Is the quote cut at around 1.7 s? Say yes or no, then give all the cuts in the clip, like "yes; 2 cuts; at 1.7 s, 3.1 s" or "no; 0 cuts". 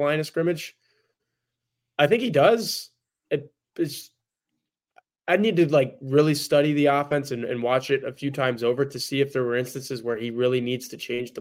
no; 0 cuts